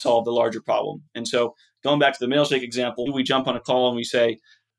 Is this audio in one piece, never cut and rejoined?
no; 1 cut; at 3.1 s

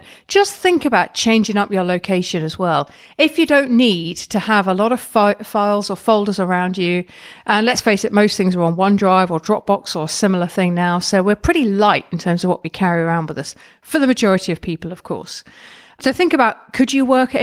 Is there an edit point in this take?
no; 0 cuts

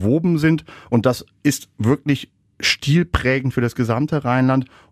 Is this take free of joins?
yes; 0 cuts

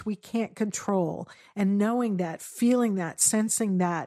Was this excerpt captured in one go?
yes; 0 cuts

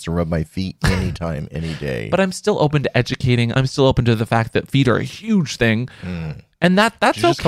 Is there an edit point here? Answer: no; 0 cuts

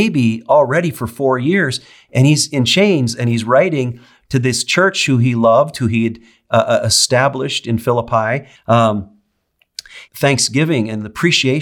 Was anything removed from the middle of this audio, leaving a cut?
yes; 2 cuts; at 8.6 s, 10.1 s

